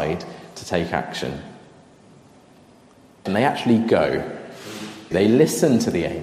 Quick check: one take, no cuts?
no; 2 cuts; at 3.3 s, 5.1 s

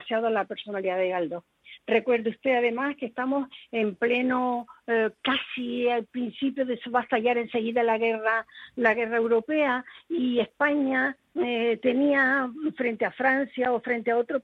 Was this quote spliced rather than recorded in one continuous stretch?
no; 0 cuts

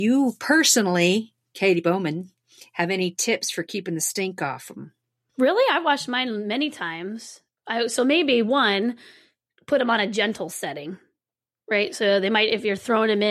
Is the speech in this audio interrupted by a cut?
no; 0 cuts

